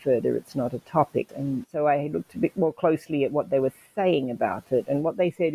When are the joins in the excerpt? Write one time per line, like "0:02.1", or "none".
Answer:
0:01.3

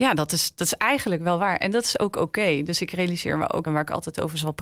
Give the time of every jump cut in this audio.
0:03.7

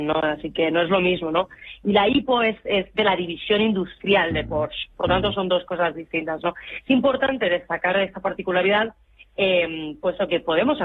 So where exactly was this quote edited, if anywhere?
none

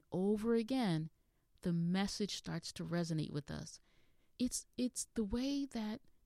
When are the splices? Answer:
0:04.4

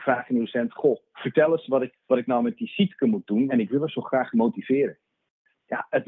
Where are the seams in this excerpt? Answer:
0:01.9
0:03.5

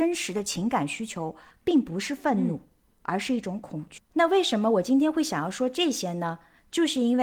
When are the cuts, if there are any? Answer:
0:04.0

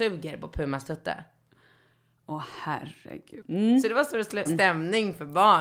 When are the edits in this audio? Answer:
0:03.4
0:04.5

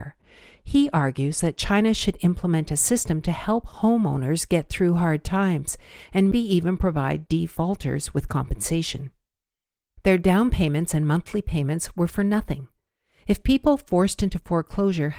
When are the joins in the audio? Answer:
0:06.3
0:10.0

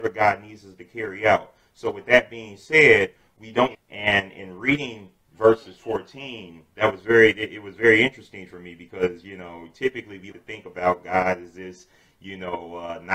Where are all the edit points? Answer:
0:03.7
0:10.3

